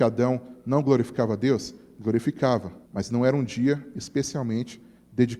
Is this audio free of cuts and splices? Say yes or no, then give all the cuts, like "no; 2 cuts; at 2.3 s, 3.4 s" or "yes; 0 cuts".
no; 1 cut; at 2.8 s